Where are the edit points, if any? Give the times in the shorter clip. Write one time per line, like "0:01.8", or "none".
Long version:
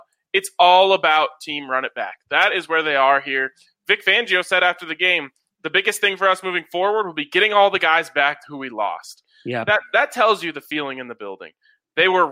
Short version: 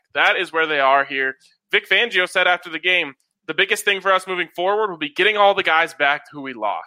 none